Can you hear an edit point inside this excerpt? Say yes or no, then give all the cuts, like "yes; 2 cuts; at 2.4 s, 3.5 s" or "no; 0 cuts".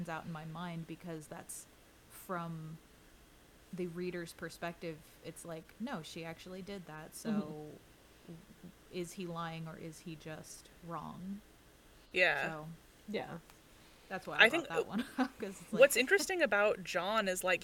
yes; 1 cut; at 2.0 s